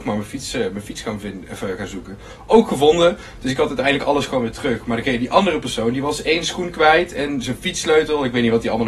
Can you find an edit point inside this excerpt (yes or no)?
no